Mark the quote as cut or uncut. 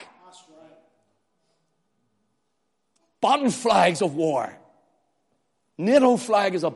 uncut